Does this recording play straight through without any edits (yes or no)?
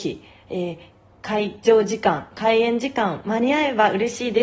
yes